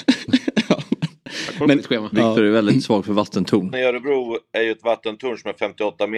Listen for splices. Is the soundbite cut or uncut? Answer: cut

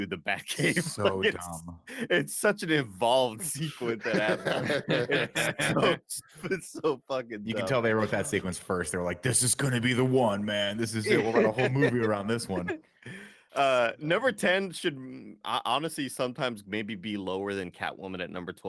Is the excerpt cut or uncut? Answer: uncut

